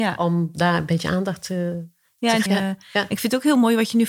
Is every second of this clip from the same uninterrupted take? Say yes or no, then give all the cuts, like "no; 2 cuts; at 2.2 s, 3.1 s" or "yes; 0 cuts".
no; 1 cut; at 2.5 s